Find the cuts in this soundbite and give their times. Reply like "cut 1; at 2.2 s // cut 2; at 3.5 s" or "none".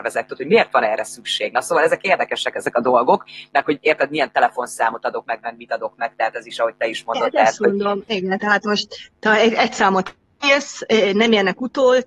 none